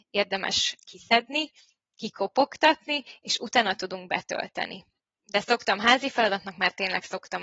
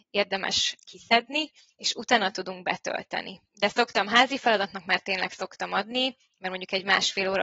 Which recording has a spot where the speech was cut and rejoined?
second; 2 cuts; at 1.7 s, 3.5 s

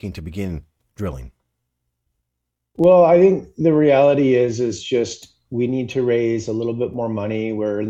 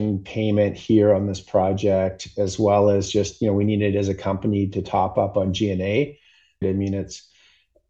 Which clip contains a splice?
second; 1 cut; at 6.6 s

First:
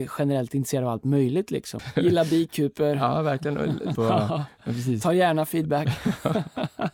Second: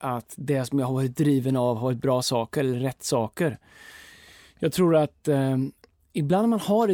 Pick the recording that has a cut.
first; 2 cuts; at 1.8 s, 3.9 s

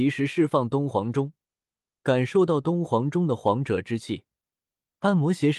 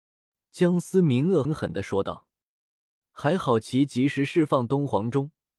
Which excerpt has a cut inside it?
second; 1 cut; at 1.4 s

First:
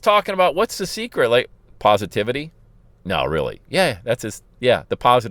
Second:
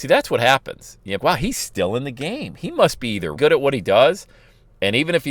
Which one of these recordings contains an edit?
second; 2 cuts; at 1.2 s, 3.4 s

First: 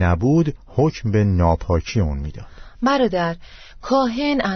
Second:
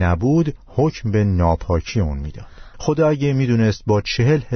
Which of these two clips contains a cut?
second; 1 cut; at 2.7 s

